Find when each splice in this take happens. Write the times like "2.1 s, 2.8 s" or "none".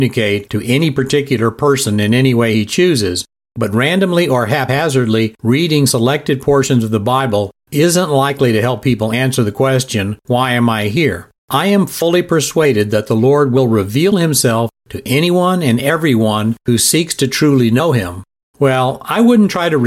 11.4 s, 18.4 s